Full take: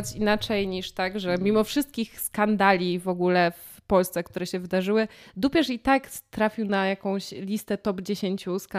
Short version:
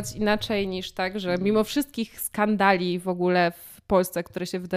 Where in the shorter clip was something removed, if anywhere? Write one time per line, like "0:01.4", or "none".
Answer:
none